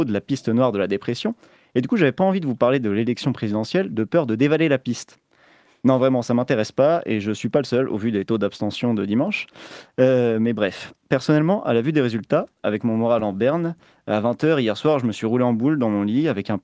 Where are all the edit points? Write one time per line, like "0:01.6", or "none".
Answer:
none